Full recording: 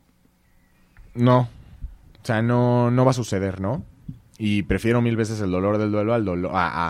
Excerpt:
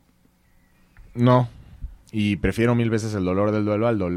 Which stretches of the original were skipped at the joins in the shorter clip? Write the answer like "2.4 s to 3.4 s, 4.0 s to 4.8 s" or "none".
2.0 s to 4.3 s